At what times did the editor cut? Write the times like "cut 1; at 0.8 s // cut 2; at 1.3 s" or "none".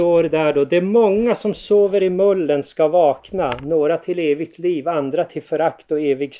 none